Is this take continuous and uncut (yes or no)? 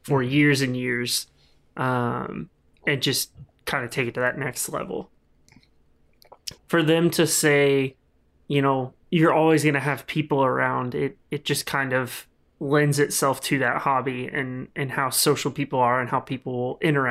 no